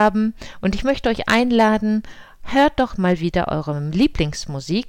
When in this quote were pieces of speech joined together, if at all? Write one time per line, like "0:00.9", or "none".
0:02.9